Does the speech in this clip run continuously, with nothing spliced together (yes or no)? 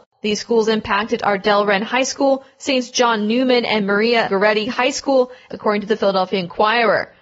no